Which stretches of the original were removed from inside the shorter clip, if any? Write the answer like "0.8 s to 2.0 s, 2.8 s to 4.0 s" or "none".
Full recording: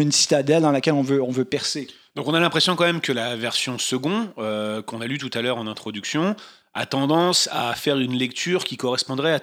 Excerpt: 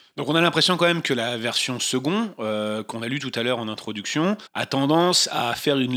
6.4 s to 6.7 s